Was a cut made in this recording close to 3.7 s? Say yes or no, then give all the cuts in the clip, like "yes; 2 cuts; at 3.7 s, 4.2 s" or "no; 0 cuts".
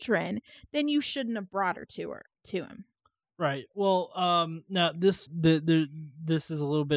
no; 1 cut; at 5.3 s